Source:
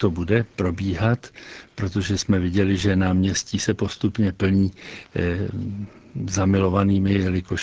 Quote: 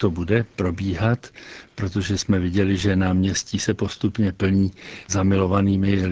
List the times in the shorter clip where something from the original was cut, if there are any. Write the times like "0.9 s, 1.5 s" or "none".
5.1 s

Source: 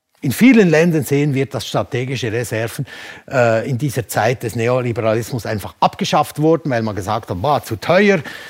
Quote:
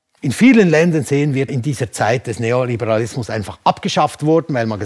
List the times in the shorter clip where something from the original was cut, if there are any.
1.5 s

